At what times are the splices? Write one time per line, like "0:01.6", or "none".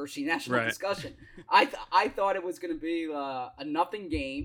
none